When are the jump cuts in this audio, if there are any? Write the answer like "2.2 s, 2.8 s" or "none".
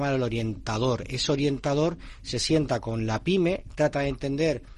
none